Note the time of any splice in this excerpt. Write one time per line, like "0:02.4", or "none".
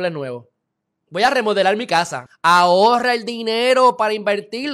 0:02.3